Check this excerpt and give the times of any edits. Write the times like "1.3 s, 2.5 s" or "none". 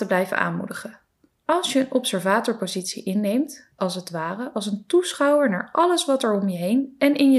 1.3 s, 3.8 s

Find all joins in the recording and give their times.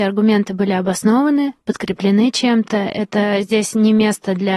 none

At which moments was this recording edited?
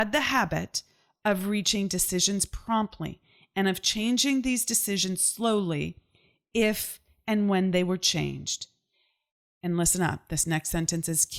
none

